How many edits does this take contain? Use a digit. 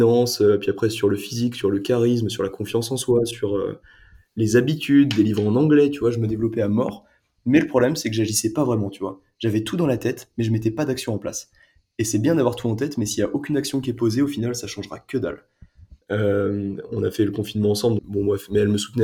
2